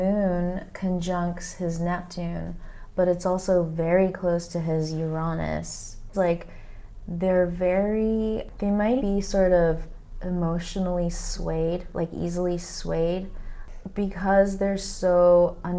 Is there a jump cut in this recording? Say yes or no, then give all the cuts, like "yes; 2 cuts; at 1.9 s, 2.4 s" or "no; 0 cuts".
yes; 2 cuts; at 6.1 s, 9.0 s